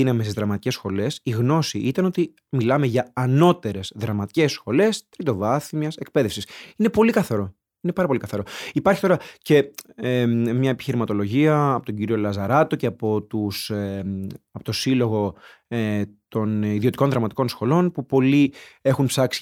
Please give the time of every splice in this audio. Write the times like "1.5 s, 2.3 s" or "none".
none

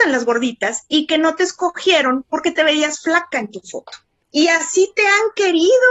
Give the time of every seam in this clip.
4.2 s

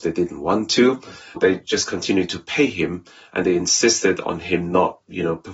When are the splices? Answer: 1.4 s

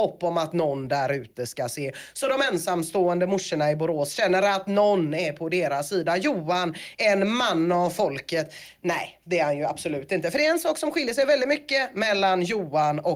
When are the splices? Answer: none

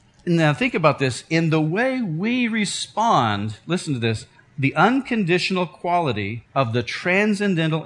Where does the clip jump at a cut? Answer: 6.5 s

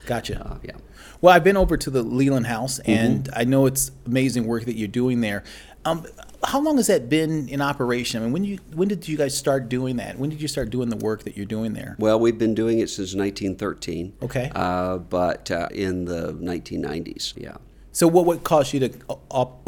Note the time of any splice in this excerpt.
15.7 s, 17.3 s

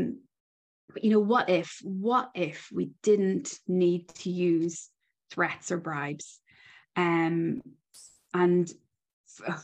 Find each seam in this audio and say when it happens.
none

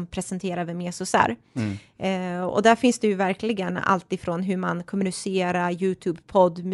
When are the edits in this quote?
none

